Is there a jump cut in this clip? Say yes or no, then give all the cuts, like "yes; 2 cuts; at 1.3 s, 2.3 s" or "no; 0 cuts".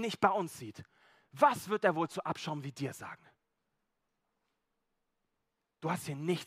no; 0 cuts